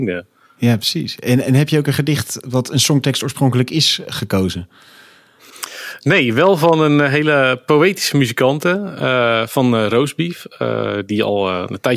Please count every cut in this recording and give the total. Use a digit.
0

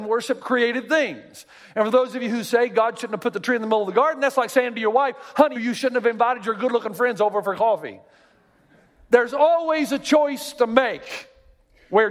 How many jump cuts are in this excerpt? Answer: 1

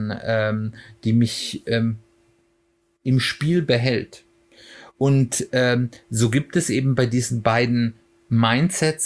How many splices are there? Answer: 0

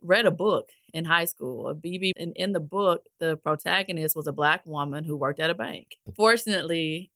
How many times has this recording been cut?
2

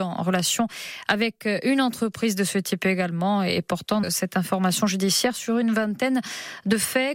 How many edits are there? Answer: 1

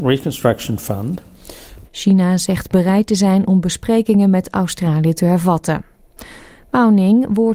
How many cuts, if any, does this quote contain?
1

